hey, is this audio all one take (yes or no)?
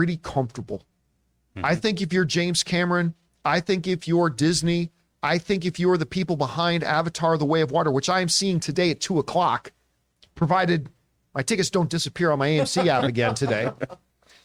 yes